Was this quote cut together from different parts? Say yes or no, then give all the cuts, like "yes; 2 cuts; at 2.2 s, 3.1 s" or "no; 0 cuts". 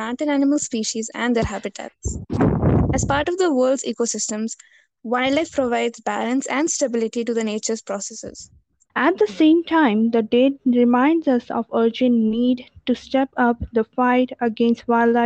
yes; 1 cut; at 8.9 s